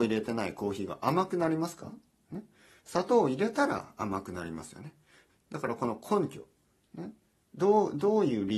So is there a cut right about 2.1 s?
no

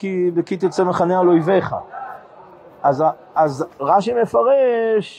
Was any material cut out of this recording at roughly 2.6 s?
no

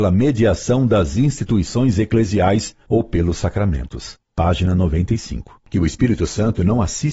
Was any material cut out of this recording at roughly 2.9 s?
no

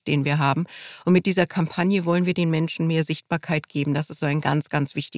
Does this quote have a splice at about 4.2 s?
yes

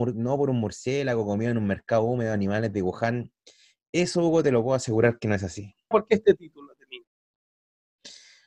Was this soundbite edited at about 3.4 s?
no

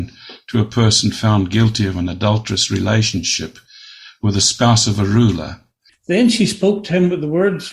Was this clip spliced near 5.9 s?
yes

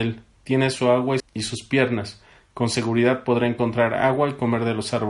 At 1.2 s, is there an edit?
yes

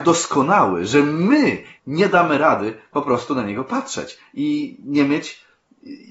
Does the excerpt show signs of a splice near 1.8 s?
yes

